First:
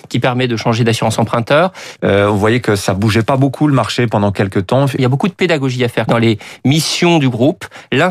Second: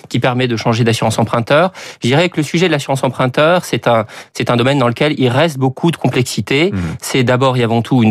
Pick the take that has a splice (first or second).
first